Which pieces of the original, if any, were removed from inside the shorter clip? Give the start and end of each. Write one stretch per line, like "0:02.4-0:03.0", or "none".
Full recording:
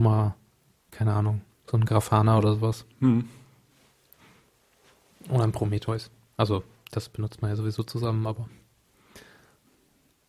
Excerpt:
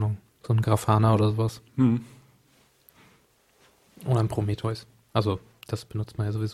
none